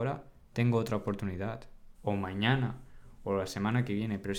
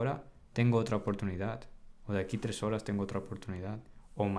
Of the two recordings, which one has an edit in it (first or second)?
first